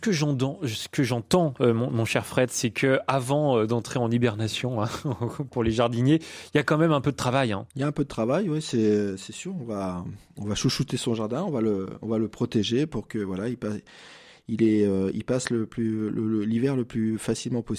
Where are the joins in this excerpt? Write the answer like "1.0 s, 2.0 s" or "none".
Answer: 7.7 s